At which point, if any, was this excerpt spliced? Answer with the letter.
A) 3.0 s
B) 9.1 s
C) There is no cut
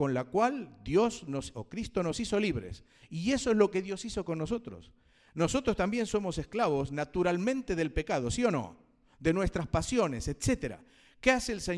A